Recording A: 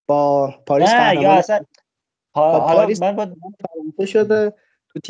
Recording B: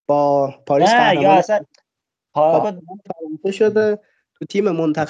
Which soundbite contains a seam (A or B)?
B